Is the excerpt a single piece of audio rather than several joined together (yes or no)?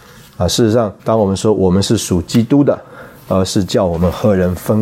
no